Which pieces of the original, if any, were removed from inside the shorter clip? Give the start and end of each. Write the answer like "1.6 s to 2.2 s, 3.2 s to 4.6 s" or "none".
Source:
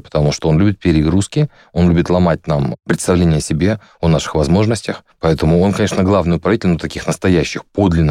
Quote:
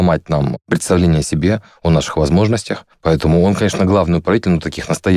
none

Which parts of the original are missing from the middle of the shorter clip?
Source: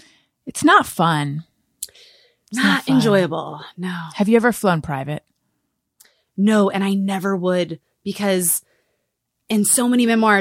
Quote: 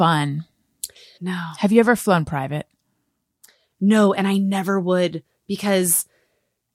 2.2 s to 3.7 s

